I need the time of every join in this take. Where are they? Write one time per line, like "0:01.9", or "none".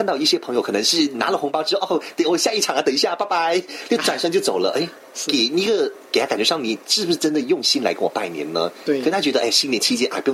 none